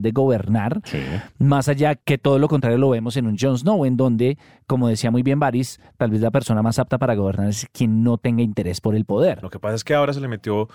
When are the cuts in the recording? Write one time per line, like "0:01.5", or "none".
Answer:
0:09.4